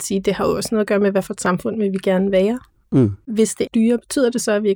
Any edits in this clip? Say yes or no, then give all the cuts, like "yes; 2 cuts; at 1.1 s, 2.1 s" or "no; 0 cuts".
yes; 1 cut; at 3.7 s